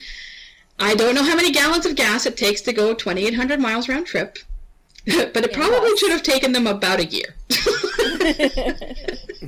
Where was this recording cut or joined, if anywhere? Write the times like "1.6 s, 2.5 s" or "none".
none